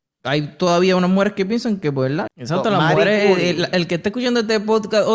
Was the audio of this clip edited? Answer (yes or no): yes